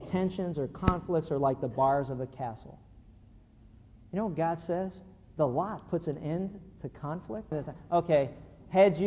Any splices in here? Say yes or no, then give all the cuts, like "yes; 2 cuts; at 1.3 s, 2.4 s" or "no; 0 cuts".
yes; 1 cut; at 7.5 s